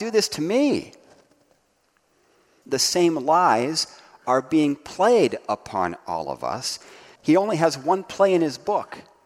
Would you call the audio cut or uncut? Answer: cut